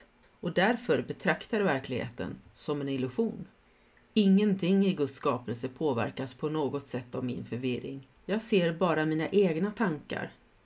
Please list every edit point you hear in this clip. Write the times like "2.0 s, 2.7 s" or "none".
8.2 s